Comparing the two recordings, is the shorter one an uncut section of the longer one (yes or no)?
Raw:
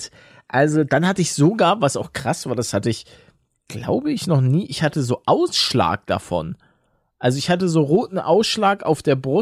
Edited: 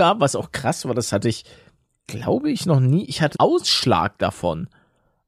no